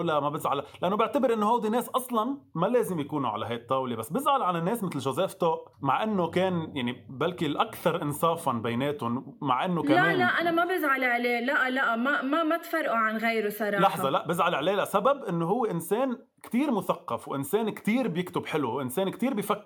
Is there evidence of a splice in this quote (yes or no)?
yes